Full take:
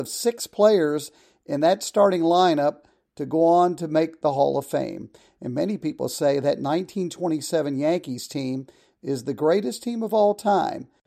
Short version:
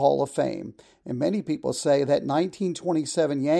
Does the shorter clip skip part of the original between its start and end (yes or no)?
no